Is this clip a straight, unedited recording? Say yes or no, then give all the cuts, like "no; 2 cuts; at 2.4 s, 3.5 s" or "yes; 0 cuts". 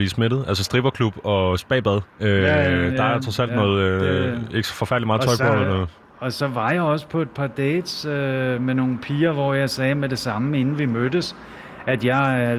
no; 1 cut; at 2.1 s